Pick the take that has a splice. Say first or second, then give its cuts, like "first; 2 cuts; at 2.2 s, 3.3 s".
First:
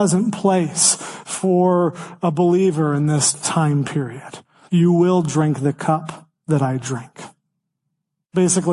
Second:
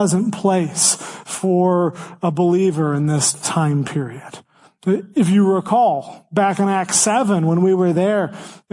first; 1 cut; at 4.7 s